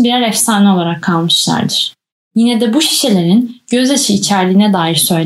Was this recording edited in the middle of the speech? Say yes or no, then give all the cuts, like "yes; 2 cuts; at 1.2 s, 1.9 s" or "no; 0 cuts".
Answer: no; 0 cuts